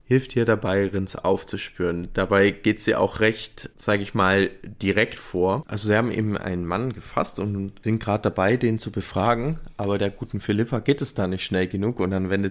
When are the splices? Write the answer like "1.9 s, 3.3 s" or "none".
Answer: none